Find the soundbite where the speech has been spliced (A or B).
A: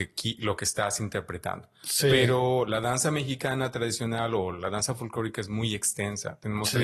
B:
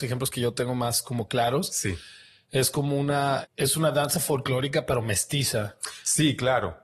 B